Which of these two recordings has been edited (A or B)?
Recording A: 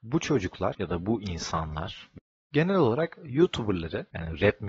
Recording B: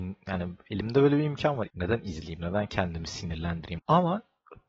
B